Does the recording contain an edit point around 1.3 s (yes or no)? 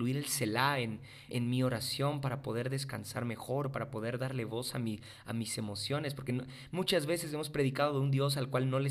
yes